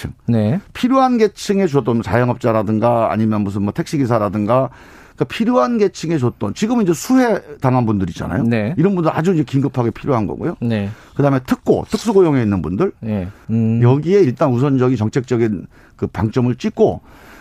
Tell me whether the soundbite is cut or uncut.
cut